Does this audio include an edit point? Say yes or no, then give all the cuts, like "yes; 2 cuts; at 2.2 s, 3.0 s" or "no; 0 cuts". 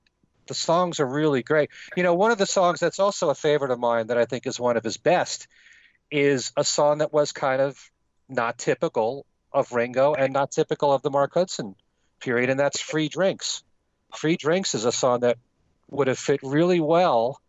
no; 0 cuts